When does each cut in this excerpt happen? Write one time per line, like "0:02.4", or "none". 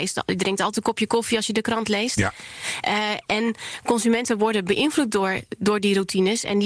none